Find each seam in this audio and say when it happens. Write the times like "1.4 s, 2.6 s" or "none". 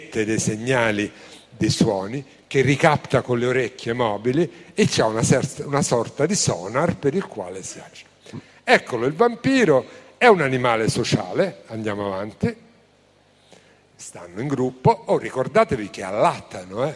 none